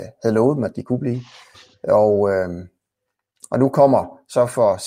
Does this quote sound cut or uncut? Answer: uncut